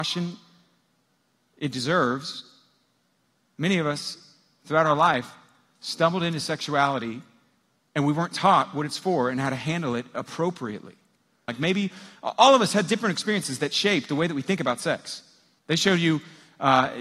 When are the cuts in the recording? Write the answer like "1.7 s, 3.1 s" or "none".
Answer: 11.5 s, 15.6 s